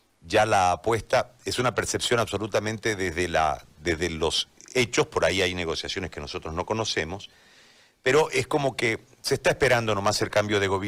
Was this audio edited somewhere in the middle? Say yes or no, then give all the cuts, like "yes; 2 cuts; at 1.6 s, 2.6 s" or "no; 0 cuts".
no; 0 cuts